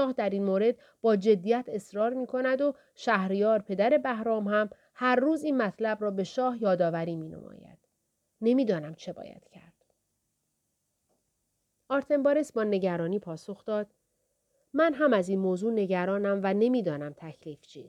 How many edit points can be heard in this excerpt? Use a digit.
0